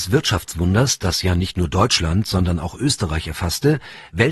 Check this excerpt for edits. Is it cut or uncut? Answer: uncut